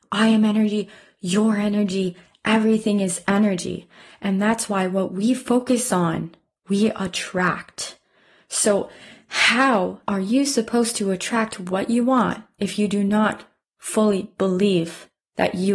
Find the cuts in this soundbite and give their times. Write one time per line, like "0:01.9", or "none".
0:10.0

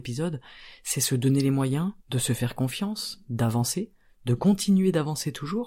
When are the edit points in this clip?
0:02.0

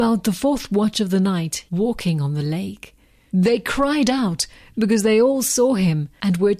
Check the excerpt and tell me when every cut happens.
0:01.7
0:03.3

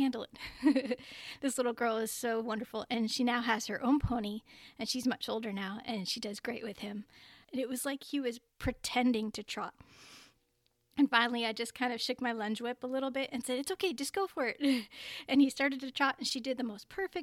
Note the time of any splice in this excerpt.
0:07.4

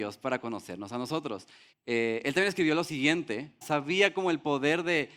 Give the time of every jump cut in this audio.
0:01.7
0:03.6

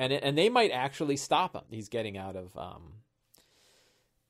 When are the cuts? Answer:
0:01.6

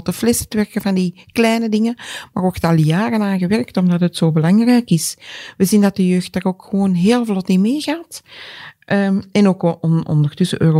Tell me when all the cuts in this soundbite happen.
none

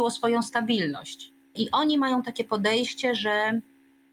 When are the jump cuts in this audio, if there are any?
0:01.6

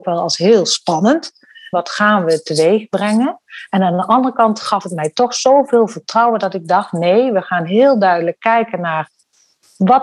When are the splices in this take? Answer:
0:01.7

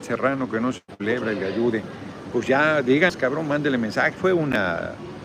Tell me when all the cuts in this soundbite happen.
0:04.1

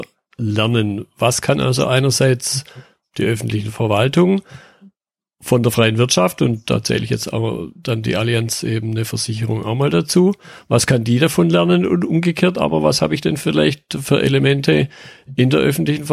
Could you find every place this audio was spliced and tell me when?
none

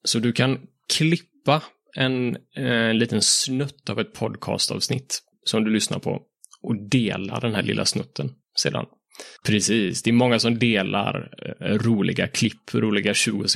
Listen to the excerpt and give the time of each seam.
0:09.4

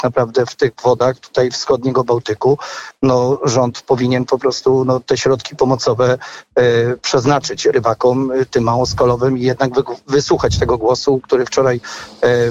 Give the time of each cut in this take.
none

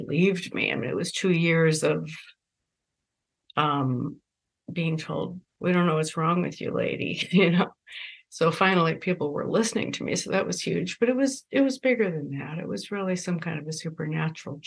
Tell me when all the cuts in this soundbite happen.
0:05.5

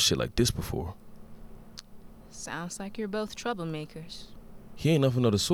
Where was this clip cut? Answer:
none

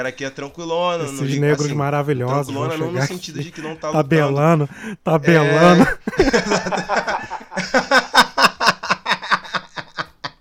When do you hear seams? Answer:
none

